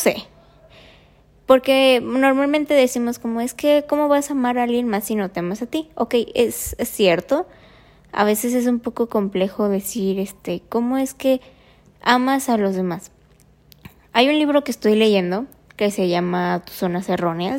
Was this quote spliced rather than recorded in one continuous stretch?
no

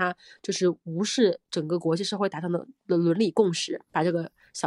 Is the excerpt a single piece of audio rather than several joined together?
yes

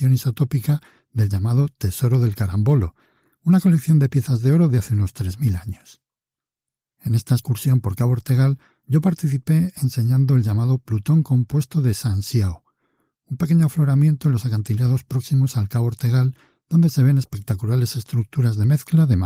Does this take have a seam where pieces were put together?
no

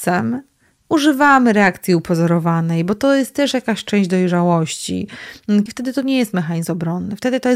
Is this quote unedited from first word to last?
no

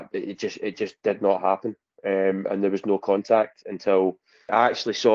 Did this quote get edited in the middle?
no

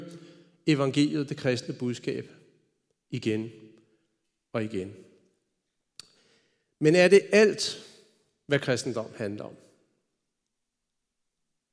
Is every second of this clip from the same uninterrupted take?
yes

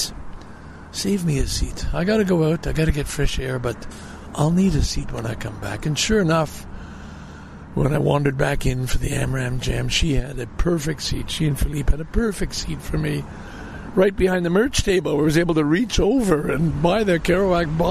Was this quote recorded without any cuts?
no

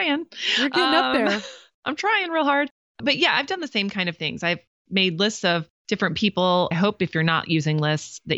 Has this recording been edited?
yes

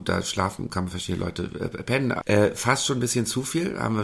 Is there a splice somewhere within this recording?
yes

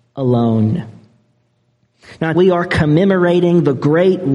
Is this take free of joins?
no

